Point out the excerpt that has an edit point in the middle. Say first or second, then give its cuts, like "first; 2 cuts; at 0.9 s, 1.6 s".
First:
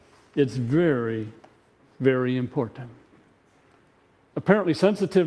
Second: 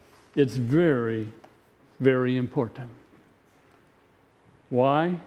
first; 1 cut; at 4.3 s